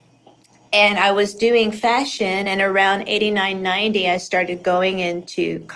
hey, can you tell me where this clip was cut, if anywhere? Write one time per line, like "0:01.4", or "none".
none